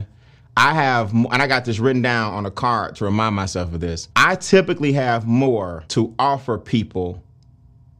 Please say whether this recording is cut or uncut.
cut